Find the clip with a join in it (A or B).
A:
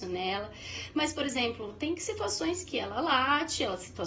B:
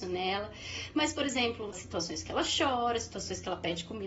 B